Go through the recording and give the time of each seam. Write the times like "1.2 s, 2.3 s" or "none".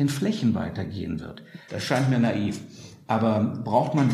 1.7 s